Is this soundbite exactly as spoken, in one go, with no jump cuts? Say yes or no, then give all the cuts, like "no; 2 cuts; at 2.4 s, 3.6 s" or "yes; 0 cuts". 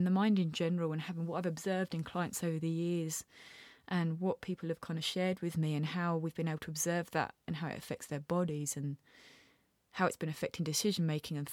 yes; 0 cuts